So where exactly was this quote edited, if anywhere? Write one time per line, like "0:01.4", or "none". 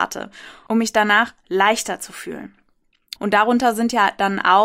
0:03.2